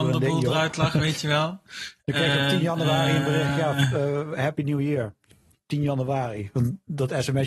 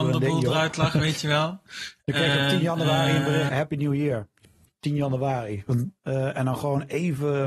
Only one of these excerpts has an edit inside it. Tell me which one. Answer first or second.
second